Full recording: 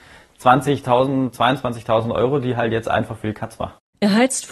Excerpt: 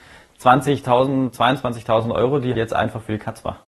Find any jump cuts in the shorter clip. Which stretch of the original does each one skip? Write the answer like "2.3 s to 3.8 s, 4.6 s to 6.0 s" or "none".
2.5 s to 2.7 s